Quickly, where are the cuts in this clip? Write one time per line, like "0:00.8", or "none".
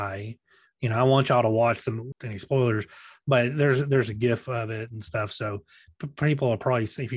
0:02.1